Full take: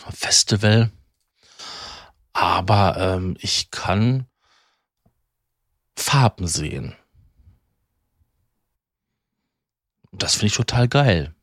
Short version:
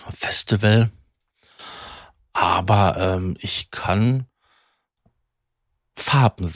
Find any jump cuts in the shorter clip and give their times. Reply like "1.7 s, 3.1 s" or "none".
none